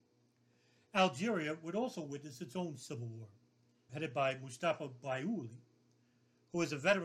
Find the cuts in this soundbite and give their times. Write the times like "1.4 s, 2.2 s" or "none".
3.9 s